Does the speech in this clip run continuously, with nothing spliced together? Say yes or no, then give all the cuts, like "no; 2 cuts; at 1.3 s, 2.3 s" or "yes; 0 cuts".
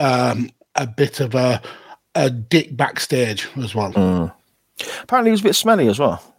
yes; 0 cuts